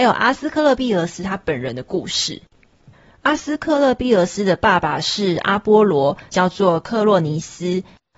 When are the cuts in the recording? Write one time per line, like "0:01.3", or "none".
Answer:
0:06.3

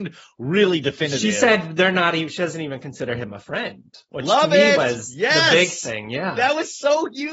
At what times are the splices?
none

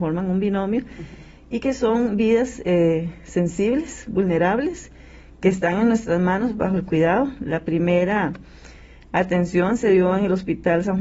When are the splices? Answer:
none

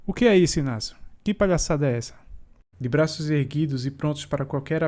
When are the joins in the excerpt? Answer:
0:02.7

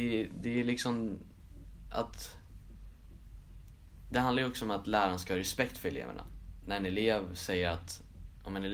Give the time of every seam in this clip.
0:06.6

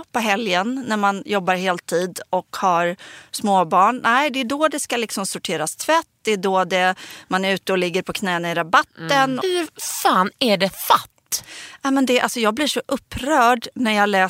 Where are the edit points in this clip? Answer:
0:09.4

